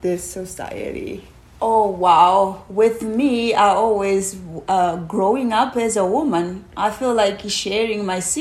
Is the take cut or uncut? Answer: uncut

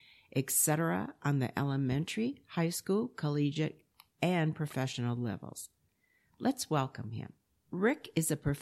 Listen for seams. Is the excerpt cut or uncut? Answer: cut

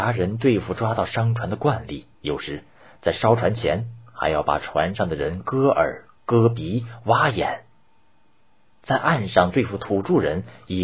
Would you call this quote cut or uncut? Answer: cut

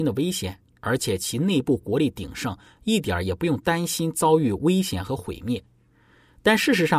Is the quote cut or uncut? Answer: uncut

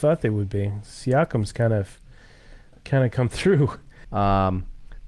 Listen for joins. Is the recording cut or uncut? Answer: cut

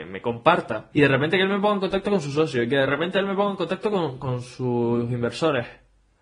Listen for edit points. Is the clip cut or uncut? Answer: cut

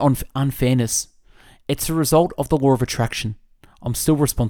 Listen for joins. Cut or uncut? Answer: uncut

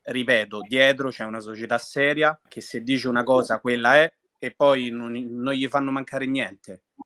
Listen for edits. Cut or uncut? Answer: cut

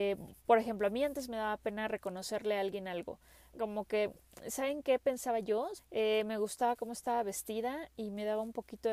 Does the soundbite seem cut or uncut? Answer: cut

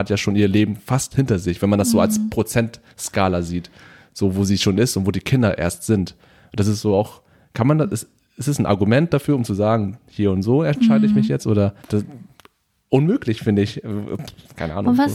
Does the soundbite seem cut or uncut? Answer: cut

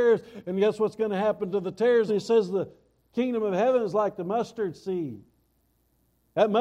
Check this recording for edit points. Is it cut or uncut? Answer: cut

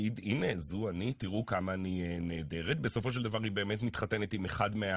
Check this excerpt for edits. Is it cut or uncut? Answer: uncut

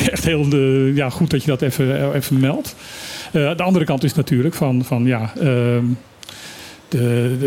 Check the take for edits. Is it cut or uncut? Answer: uncut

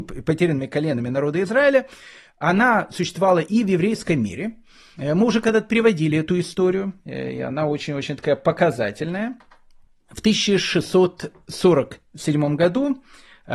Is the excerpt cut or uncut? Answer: uncut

